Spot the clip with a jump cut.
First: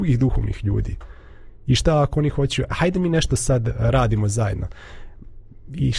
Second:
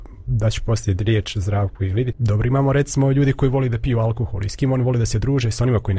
second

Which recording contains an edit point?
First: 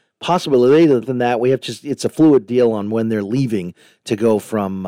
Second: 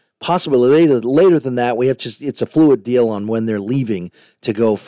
first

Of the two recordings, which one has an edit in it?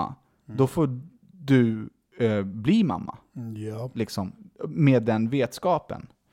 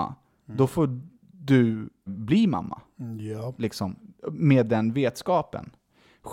second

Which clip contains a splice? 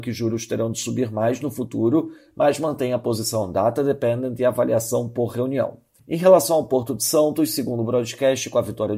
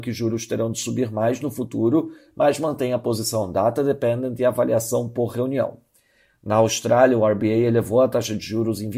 first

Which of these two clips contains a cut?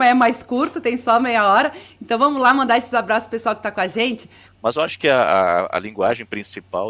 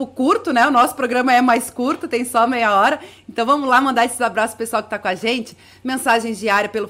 first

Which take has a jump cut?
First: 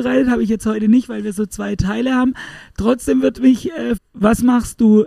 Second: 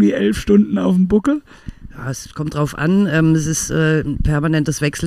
first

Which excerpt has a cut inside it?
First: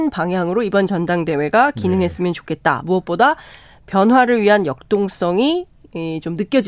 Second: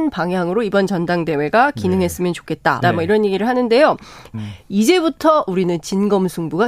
second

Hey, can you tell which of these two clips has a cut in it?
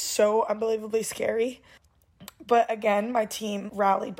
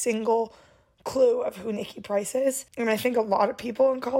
second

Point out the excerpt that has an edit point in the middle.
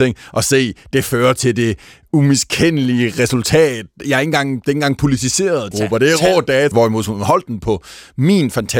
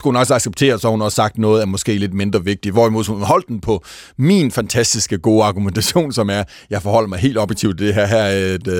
first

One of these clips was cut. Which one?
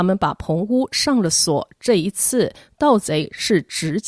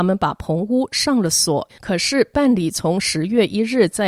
second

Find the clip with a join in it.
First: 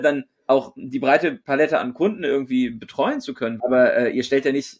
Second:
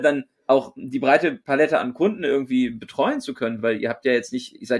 first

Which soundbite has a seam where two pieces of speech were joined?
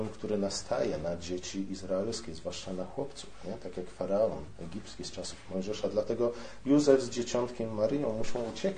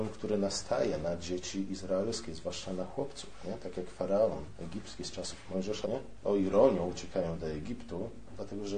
second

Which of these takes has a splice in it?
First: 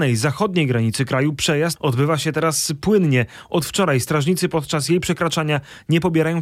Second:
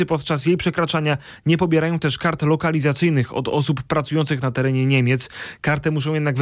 first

